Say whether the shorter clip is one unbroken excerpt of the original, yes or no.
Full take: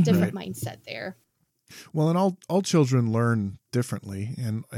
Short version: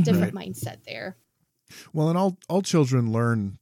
yes